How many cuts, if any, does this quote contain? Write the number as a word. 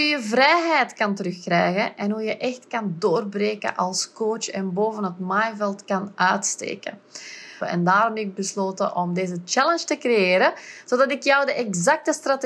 one